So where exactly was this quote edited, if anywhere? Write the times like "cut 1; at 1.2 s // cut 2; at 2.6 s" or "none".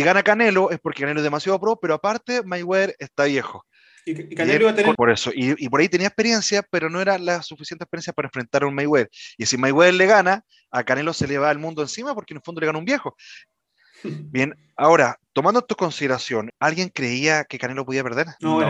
cut 1; at 5.0 s // cut 2; at 13.6 s // cut 3; at 16.5 s